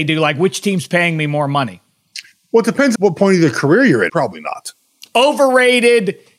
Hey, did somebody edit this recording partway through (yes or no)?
yes